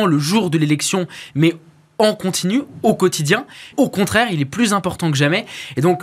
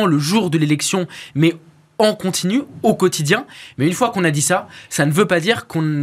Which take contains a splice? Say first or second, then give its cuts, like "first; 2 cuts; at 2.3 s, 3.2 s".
first; 1 cut; at 3.7 s